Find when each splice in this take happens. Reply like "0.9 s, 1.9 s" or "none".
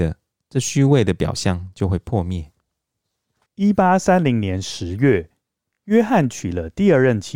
none

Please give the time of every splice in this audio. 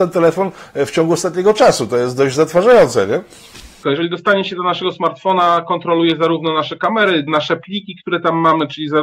3.8 s, 7.3 s

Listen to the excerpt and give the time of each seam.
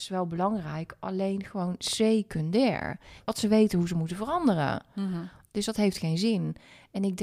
3.2 s

